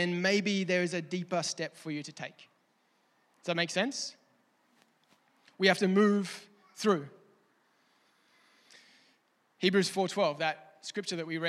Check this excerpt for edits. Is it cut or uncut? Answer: uncut